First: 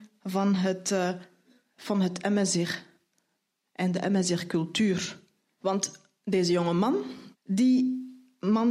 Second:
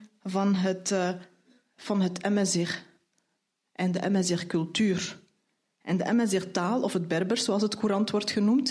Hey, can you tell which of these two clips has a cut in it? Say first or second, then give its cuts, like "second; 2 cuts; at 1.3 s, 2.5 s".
first; 2 cuts; at 5.6 s, 7.3 s